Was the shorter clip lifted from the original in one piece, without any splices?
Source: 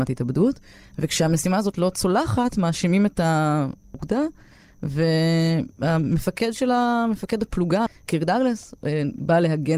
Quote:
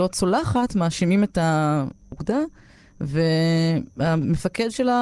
yes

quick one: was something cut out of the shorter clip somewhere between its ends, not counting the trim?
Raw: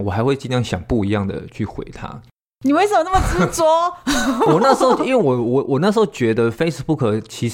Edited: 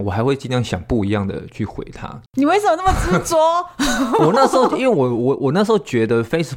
yes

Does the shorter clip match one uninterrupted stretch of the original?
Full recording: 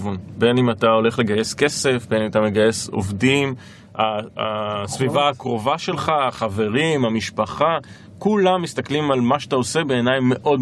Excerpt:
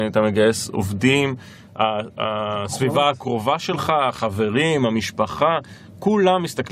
yes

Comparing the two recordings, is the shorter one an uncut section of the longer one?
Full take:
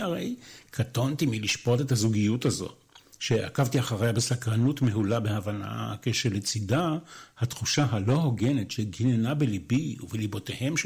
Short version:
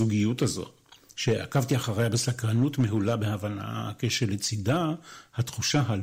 yes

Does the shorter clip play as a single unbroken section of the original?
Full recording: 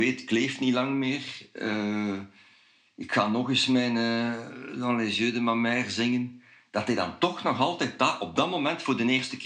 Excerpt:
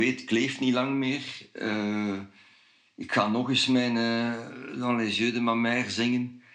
yes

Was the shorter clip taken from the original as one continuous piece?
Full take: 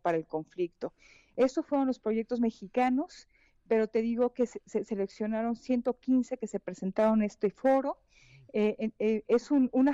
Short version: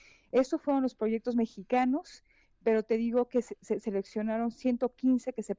yes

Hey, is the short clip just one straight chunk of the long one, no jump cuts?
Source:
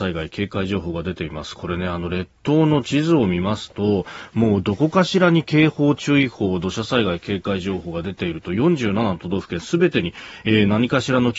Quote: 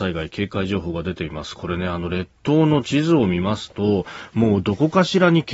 yes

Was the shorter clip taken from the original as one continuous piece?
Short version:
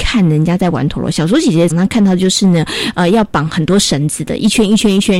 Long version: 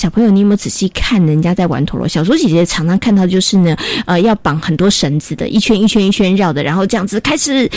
no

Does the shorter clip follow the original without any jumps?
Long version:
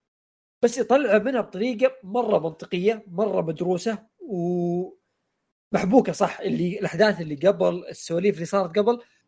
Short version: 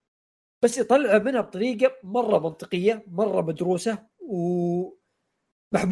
yes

